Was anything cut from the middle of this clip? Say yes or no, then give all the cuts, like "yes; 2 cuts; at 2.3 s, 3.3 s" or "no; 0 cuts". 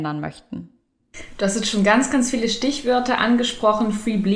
no; 0 cuts